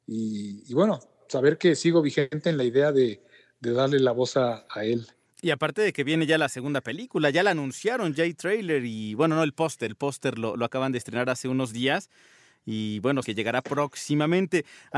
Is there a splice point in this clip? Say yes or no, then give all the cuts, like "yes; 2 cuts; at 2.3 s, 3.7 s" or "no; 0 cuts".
yes; 2 cuts; at 9.9 s, 13.2 s